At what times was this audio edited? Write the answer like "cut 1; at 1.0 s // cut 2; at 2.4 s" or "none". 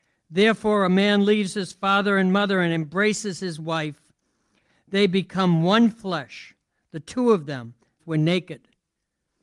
cut 1; at 8.0 s

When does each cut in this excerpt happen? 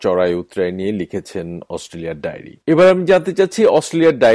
cut 1; at 2.6 s

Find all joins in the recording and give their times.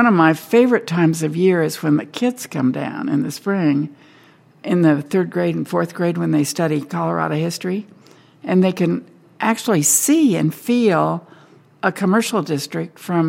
none

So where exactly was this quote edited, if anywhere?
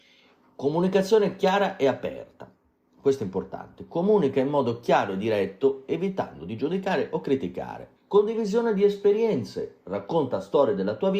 cut 1; at 8.0 s

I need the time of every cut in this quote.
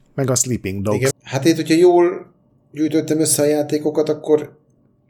cut 1; at 1.1 s

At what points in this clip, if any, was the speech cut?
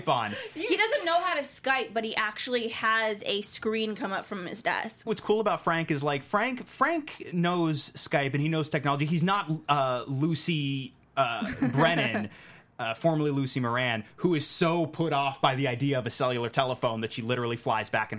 cut 1; at 5.1 s

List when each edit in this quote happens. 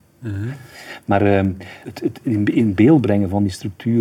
cut 1; at 1.8 s

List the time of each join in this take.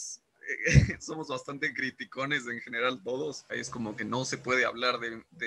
cut 1; at 3.5 s

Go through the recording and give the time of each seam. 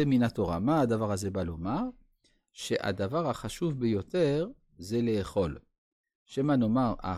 none

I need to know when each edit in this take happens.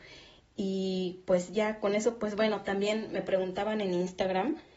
none

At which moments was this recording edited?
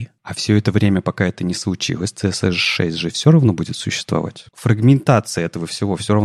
cut 1; at 4.5 s

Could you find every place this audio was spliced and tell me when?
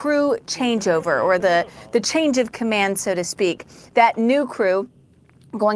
none

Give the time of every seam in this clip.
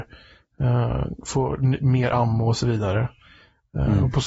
none

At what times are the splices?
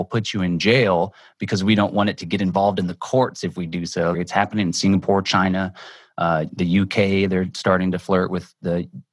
cut 1; at 4.1 s

